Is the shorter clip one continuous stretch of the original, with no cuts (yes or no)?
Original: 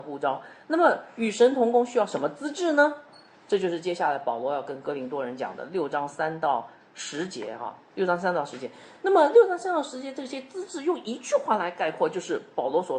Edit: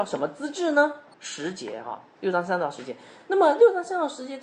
no